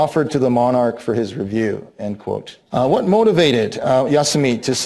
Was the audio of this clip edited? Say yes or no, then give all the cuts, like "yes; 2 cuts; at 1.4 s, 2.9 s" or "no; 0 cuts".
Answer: yes; 1 cut; at 2.7 s